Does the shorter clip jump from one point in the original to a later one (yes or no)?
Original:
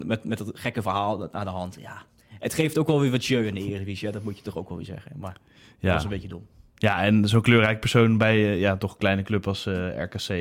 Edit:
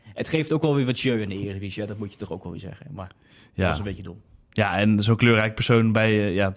no